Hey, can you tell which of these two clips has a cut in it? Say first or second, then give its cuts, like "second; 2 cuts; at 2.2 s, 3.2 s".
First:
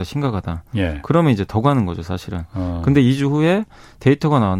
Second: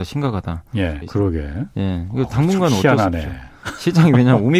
second; 1 cut; at 1.0 s